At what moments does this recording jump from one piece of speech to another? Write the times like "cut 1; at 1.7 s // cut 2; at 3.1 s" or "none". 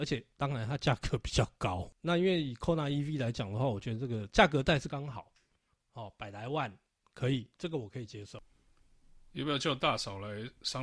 cut 1; at 4.9 s